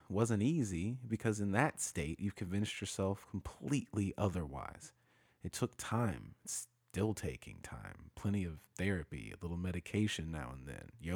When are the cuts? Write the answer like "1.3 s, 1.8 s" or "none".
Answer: none